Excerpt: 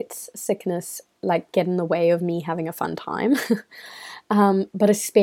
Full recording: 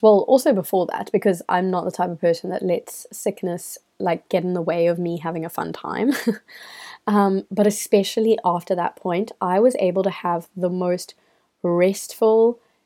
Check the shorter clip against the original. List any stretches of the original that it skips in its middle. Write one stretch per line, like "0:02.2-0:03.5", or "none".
none

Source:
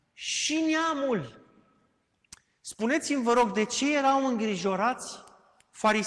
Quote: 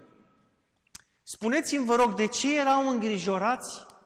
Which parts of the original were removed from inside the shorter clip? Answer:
none

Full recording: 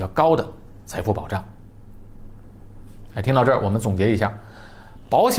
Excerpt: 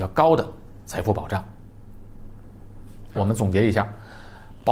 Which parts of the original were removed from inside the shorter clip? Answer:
0:03.1-0:03.6

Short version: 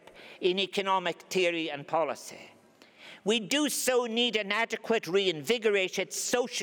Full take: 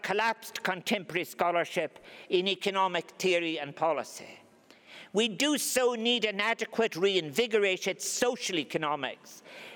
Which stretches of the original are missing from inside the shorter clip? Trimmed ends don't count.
none

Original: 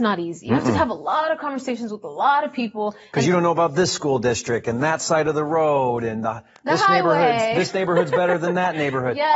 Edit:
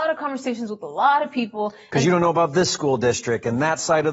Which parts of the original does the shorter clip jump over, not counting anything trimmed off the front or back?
none

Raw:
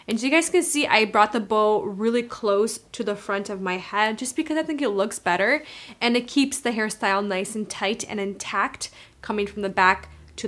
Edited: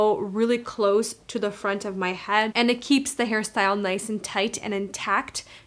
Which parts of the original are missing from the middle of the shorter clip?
0:04.2-0:06.0

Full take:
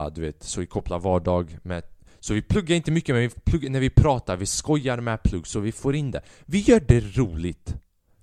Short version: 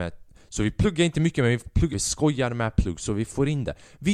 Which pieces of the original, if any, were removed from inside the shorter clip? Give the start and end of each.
0:03.6-0:04.4

